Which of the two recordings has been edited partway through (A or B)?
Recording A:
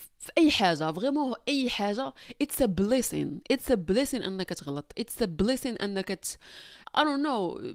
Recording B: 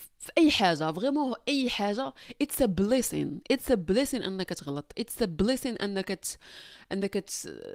A